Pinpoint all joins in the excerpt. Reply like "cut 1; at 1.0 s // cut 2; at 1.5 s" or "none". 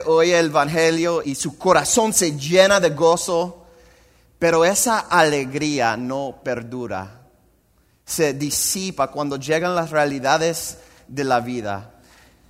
cut 1; at 1.2 s